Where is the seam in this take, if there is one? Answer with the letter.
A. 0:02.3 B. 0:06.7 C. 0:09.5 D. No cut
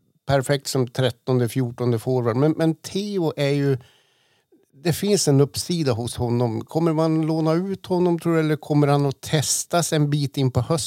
D